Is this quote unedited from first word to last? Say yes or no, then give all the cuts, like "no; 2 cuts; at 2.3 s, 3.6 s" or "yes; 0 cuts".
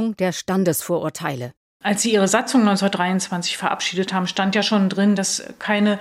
yes; 0 cuts